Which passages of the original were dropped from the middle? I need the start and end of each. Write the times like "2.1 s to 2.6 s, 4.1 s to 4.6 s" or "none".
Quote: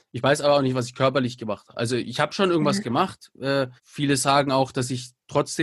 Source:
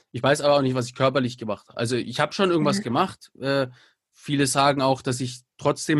3.8 s to 4.1 s

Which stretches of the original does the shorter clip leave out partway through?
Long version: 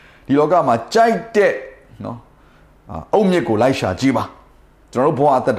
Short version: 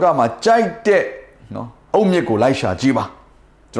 2.4 s to 3.1 s

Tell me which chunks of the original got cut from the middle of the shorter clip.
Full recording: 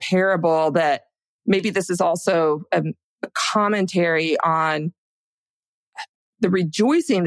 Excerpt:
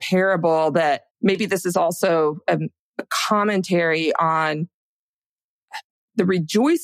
1.1 s to 1.4 s

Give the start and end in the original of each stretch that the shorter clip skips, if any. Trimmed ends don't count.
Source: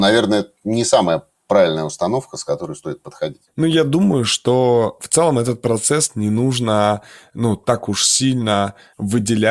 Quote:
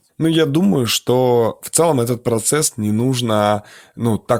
none

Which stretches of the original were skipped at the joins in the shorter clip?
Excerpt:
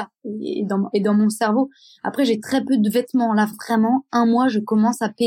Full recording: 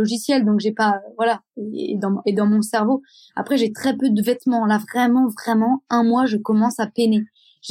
4.9 s to 5.3 s

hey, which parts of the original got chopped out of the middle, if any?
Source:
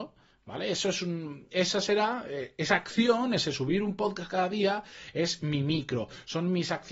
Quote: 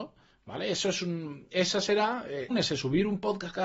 2.5 s to 3.3 s

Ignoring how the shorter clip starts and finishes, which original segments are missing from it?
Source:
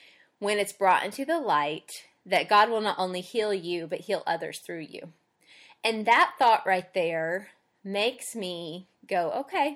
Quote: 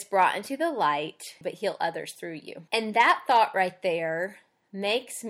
2.1 s to 3.9 s, 5.1 s to 5.8 s

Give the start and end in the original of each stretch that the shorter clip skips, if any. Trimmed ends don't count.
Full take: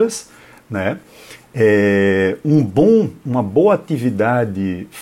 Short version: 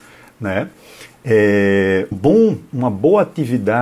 2.4 s to 2.6 s

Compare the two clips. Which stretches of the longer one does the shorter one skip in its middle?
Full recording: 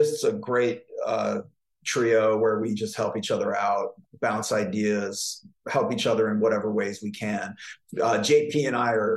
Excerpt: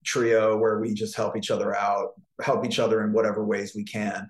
4.1 s to 5.6 s

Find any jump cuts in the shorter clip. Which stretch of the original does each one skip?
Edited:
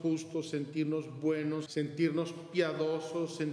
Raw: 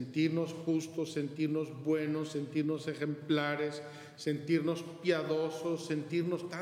2.3 s to 4.2 s

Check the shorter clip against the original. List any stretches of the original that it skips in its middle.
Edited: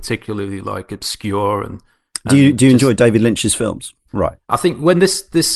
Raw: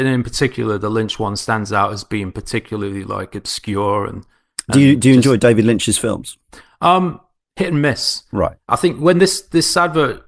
6.5 s to 8.3 s

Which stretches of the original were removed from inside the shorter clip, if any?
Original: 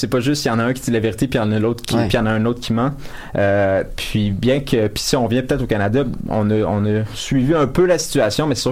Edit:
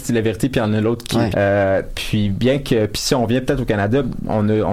2.1 s to 3.3 s

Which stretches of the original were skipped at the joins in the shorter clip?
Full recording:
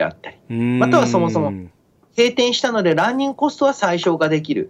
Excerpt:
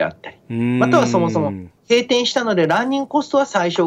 1.8 s to 2.0 s

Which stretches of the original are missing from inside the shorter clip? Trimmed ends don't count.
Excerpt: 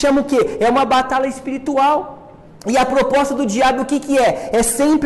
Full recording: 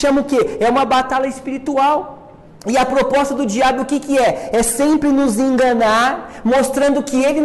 none

